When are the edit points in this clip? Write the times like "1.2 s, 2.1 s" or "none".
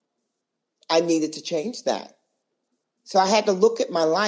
none